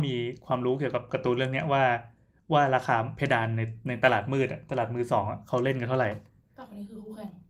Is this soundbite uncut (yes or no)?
yes